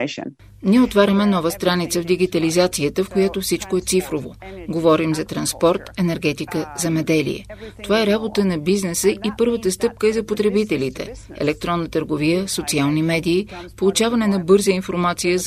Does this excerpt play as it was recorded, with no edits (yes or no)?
yes